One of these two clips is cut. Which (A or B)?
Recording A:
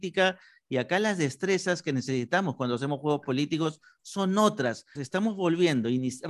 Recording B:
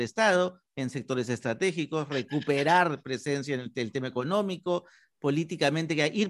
A